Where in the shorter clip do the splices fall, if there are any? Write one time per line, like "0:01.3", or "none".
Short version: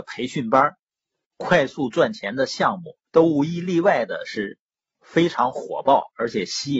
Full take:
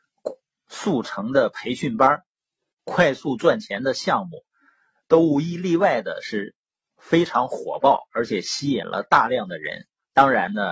0:03.1